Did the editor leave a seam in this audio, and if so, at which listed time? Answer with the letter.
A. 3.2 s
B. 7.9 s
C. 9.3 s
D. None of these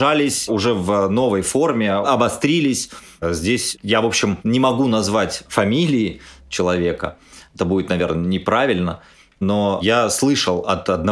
A